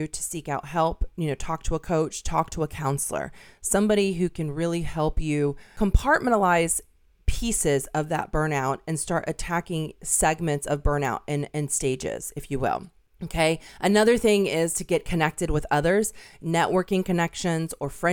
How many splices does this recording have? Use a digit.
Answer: 0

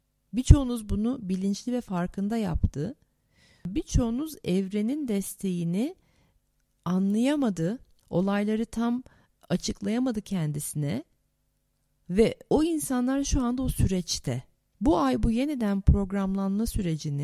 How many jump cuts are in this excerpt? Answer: 2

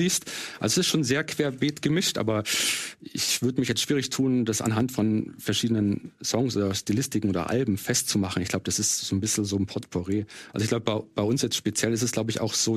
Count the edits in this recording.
0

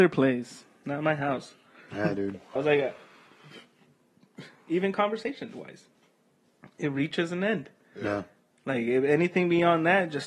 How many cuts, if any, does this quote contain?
1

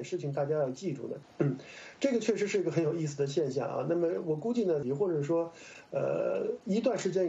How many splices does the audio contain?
2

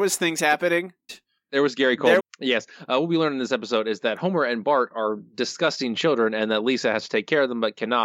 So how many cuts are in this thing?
2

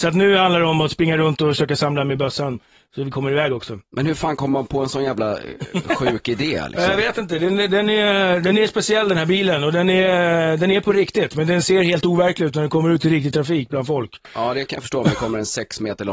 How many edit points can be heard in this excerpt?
1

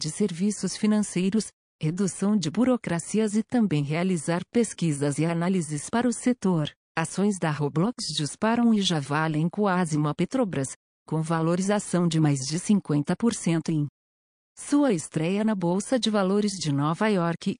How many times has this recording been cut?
1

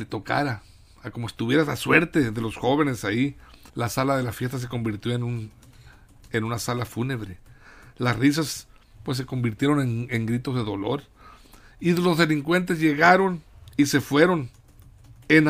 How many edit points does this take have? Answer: 1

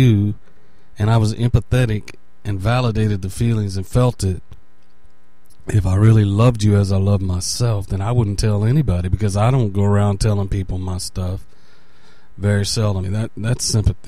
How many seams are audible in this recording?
1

